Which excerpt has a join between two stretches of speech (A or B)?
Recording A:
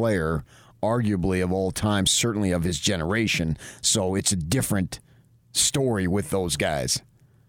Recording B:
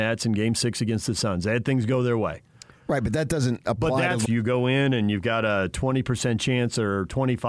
B